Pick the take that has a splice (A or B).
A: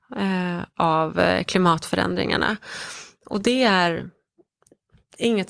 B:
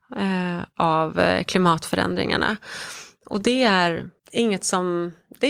B